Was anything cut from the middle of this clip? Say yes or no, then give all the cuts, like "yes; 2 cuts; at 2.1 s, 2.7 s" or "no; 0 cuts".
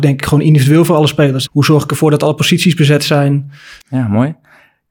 yes; 2 cuts; at 1.5 s, 3.8 s